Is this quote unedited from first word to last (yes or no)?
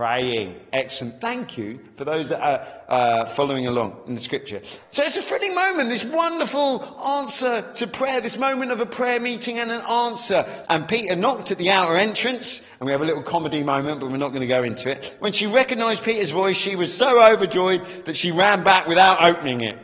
no